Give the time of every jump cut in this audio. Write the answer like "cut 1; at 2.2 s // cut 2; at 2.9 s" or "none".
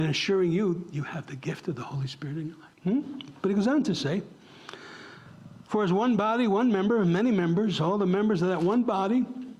cut 1; at 2.7 s